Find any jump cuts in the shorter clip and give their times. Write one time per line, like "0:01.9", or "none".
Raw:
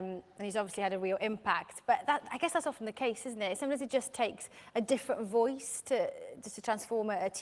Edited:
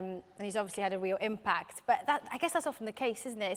none